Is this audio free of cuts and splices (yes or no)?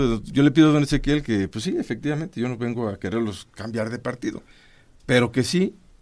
yes